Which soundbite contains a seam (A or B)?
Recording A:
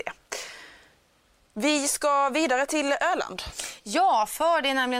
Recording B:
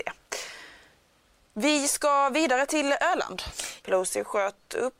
B